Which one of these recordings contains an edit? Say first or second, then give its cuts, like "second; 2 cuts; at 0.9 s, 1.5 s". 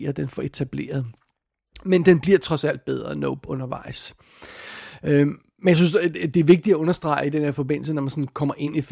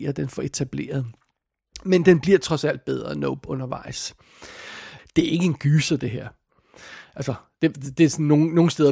second; 1 cut; at 5.0 s